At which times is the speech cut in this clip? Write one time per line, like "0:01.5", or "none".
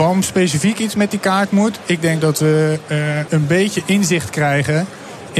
0:03.3